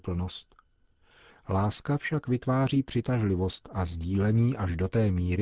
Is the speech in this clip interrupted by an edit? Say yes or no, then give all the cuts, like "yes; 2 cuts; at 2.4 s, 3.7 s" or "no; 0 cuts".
yes; 1 cut; at 1.3 s